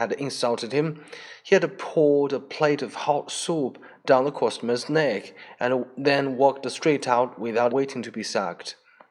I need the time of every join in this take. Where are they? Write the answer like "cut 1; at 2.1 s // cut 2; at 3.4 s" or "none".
cut 1; at 7.7 s